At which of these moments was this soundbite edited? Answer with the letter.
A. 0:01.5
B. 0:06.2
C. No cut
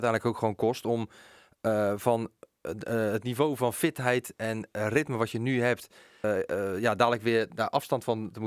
B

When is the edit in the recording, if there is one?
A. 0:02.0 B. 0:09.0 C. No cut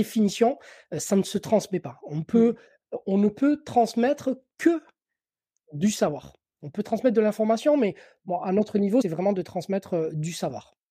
B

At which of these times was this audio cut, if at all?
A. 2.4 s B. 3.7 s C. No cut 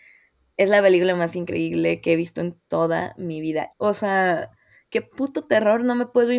B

